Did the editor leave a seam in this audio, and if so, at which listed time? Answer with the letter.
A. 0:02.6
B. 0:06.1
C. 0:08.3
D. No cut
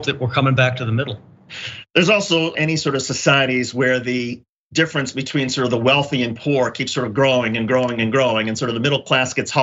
A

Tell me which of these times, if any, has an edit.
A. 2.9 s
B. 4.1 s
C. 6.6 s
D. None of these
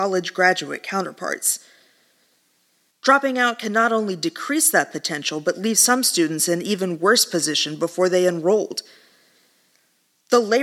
A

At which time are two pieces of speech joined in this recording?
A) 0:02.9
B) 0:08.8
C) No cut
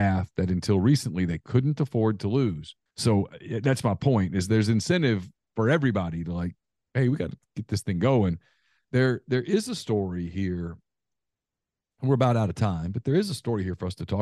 A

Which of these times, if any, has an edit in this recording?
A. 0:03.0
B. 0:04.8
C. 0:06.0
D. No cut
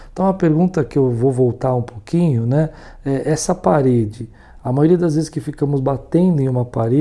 D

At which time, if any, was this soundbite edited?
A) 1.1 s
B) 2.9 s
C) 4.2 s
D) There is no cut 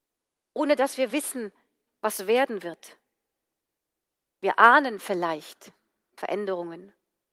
A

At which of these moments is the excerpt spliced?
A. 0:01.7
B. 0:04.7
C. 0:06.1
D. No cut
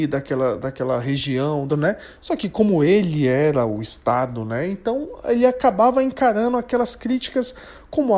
A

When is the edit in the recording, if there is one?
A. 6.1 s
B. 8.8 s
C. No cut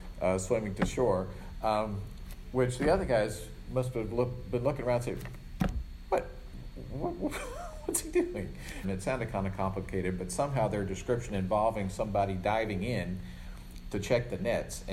B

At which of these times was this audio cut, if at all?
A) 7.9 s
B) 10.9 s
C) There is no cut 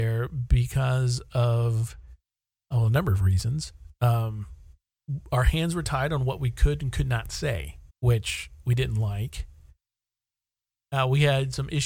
A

